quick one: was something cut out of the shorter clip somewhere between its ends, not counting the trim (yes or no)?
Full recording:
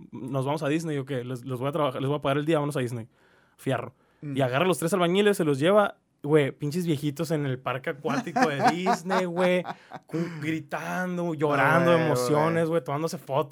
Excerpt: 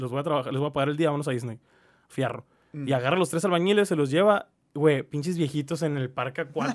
no